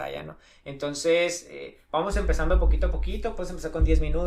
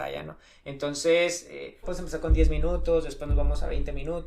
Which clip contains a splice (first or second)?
second